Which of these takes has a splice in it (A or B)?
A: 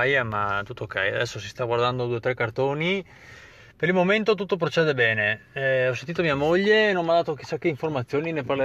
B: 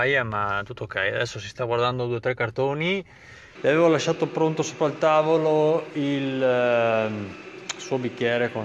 B